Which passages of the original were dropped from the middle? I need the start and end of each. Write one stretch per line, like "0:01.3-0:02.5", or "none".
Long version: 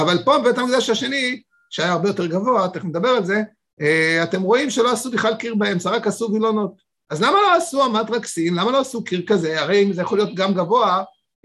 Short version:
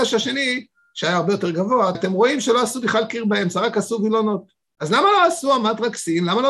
0:02.7-0:04.2